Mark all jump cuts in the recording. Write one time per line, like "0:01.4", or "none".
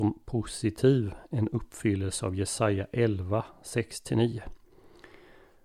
none